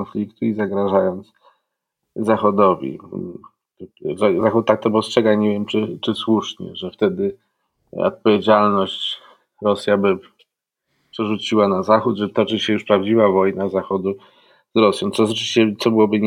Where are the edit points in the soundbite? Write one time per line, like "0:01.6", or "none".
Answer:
none